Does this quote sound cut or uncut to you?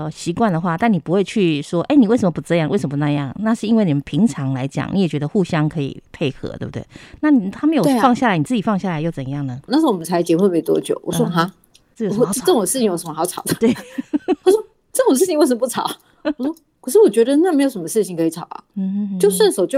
cut